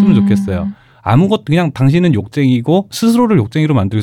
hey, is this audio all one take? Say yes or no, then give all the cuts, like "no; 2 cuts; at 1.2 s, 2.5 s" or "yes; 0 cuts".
yes; 0 cuts